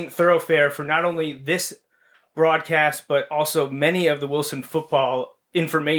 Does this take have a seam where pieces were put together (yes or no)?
no